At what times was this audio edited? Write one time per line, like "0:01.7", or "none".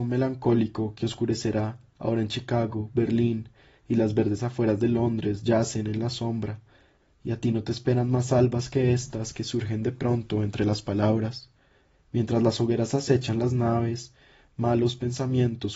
none